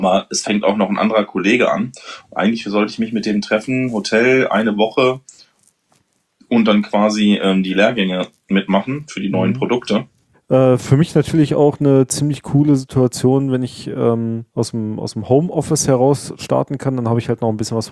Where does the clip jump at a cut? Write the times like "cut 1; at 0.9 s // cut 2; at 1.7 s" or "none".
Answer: cut 1; at 10.3 s // cut 2; at 14.5 s